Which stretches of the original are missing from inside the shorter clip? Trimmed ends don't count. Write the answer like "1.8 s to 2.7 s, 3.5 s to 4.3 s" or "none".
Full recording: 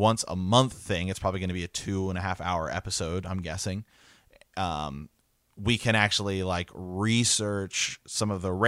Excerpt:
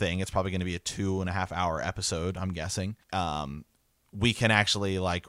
3.9 s to 4.5 s